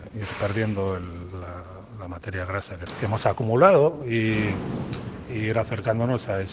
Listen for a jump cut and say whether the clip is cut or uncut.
uncut